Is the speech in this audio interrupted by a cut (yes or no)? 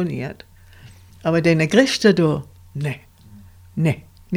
yes